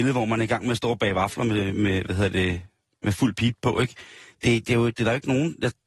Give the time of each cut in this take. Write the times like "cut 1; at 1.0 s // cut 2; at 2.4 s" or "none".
none